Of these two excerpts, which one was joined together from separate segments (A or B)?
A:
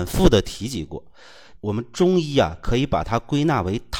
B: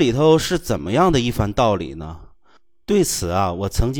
A